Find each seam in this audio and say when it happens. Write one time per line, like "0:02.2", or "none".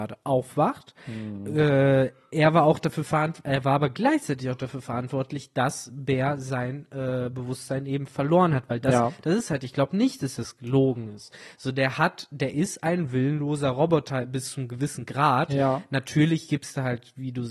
none